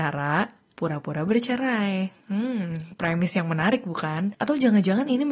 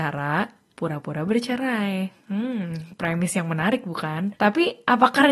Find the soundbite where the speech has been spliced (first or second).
first